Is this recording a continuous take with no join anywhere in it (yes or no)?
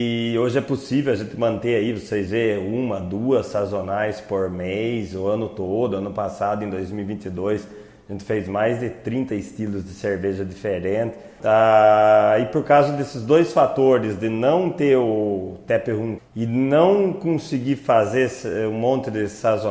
no